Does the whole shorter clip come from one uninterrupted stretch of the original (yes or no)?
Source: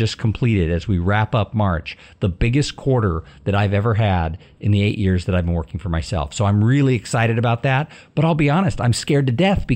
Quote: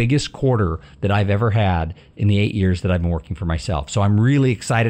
yes